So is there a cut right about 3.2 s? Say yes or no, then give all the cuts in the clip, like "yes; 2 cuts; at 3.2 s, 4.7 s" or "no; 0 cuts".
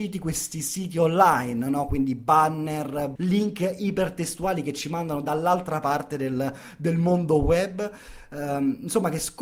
yes; 1 cut; at 3.2 s